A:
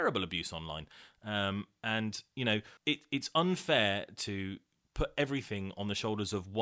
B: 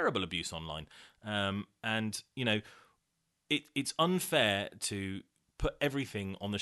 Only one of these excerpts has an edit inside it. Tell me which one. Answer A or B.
A